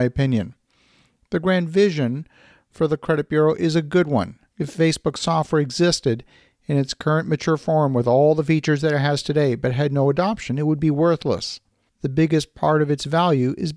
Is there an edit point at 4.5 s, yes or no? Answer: yes